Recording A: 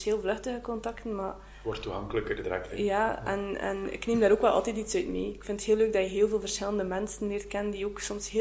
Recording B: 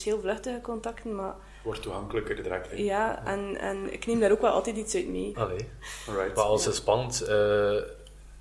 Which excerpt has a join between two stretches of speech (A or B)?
B